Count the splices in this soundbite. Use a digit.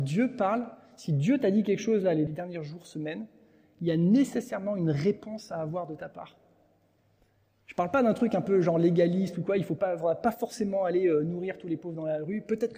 1